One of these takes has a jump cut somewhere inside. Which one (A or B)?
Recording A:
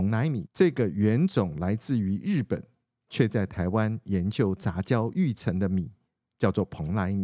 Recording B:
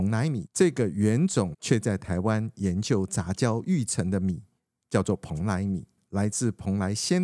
B